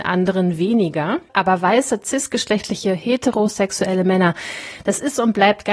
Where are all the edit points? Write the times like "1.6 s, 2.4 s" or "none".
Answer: none